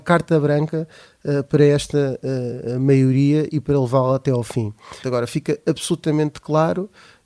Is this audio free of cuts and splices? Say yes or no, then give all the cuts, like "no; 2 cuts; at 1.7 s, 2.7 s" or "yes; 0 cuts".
no; 1 cut; at 5.0 s